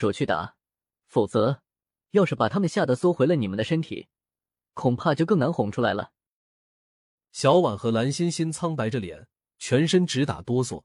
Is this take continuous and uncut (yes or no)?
yes